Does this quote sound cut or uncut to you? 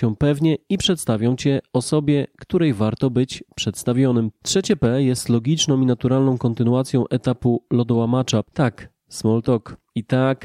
uncut